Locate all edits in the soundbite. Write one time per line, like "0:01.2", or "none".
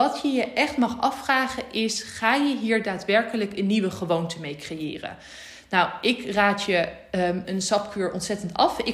0:07.4